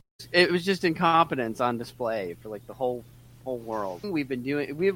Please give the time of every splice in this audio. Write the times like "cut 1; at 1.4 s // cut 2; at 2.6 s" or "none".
cut 1; at 4.0 s